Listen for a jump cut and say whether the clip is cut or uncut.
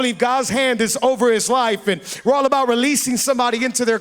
uncut